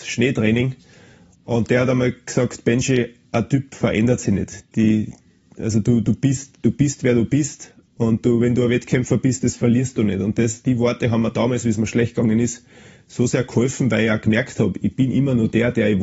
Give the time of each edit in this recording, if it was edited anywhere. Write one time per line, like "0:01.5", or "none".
none